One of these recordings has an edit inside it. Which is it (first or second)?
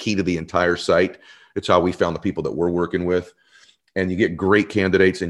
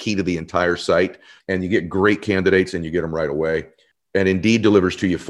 second